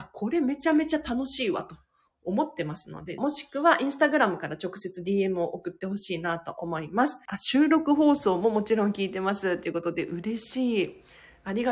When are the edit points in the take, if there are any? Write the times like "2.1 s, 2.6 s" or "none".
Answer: 3.2 s, 7.3 s